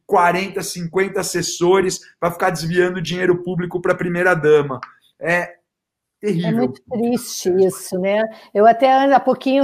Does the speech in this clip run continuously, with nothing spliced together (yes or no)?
yes